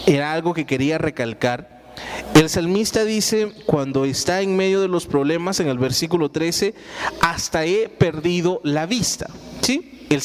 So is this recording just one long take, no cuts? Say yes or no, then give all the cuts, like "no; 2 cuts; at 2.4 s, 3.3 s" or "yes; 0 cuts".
yes; 0 cuts